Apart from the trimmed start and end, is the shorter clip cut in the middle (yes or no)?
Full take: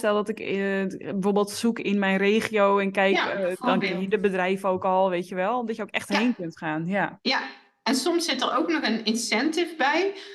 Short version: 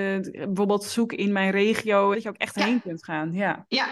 yes